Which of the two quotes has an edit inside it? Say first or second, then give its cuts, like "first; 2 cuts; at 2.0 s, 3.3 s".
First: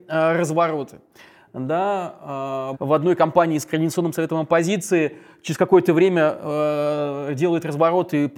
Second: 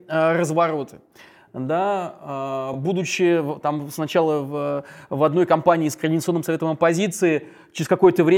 first; 1 cut; at 2.7 s